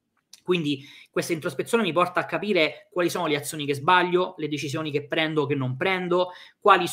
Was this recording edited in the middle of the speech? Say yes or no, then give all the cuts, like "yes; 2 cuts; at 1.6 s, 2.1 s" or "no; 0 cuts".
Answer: no; 0 cuts